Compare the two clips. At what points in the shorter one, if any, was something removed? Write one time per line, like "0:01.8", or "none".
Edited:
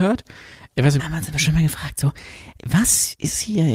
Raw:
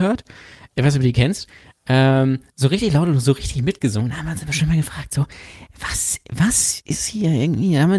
0:01.0
0:02.6